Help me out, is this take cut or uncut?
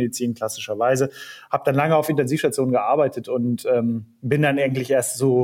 uncut